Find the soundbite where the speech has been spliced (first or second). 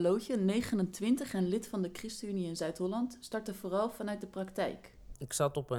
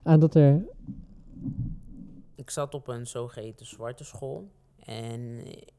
second